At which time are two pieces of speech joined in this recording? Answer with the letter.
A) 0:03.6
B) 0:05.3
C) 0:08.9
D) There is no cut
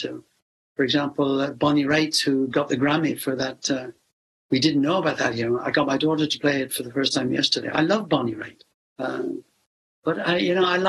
C